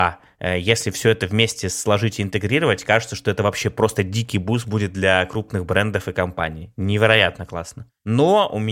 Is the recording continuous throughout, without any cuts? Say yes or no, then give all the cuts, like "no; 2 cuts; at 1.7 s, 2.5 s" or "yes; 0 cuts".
yes; 0 cuts